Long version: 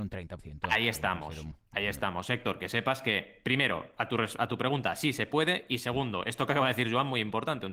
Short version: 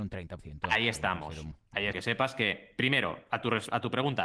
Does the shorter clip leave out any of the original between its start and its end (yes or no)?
yes